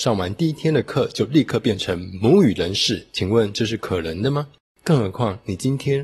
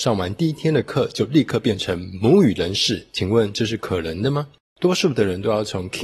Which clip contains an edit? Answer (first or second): first